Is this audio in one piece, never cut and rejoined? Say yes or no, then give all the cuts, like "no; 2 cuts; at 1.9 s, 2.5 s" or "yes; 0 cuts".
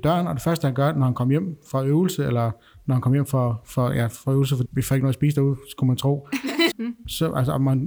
no; 2 cuts; at 4.7 s, 6.7 s